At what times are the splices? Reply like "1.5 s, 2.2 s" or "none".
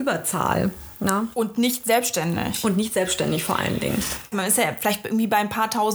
4.3 s